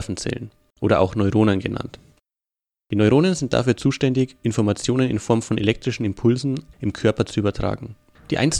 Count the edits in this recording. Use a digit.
1